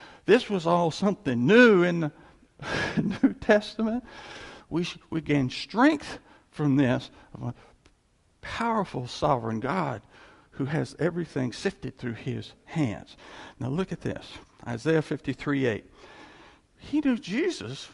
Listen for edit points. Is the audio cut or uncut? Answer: cut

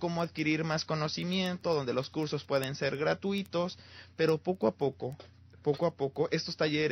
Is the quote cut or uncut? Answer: uncut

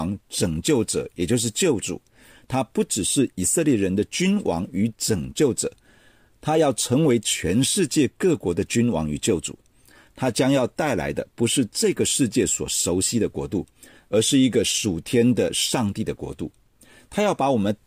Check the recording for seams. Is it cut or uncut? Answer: uncut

